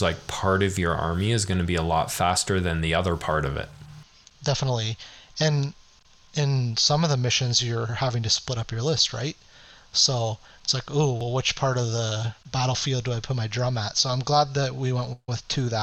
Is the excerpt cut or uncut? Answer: uncut